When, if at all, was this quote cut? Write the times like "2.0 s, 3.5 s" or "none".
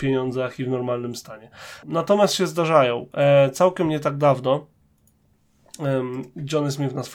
1.8 s